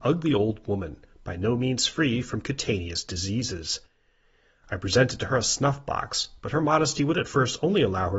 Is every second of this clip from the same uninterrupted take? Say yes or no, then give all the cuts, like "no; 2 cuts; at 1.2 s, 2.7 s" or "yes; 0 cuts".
yes; 0 cuts